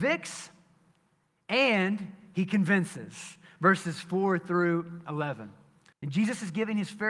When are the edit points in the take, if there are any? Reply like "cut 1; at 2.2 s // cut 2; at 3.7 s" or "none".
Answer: cut 1; at 5.9 s